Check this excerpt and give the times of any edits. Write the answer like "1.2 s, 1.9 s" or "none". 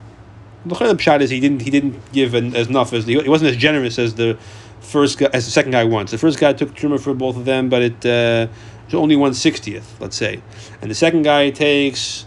none